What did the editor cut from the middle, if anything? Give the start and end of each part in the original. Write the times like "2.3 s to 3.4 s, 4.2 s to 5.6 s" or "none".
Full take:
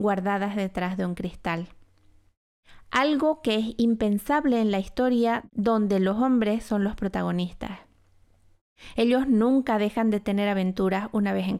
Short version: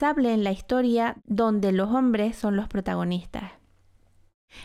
none

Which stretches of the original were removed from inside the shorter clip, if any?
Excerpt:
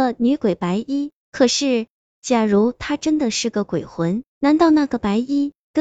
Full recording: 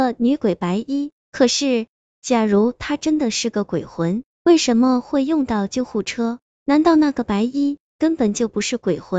4.3 s to 6.5 s

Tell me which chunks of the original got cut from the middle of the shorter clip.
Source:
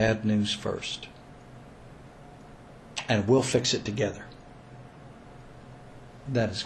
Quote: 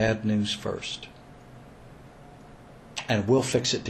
none

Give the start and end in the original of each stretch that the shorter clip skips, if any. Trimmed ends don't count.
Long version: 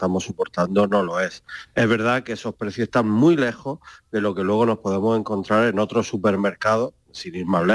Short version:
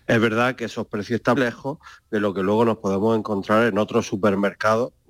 3.0 s to 3.4 s

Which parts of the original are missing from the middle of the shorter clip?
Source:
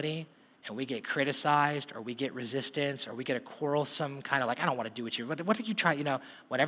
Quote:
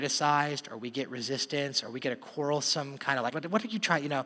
4.6 s to 5.3 s

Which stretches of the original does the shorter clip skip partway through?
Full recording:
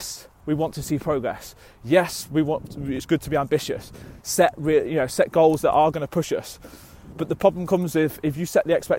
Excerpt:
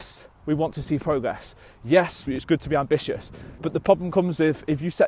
2.3 s to 2.9 s, 4.2 s to 7.1 s

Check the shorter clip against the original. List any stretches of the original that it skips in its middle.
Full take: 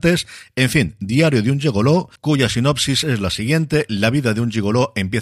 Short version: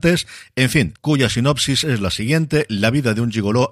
1.0 s to 2.2 s

